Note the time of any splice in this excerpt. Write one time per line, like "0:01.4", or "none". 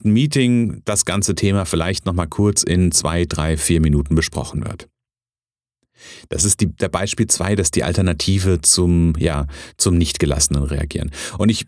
none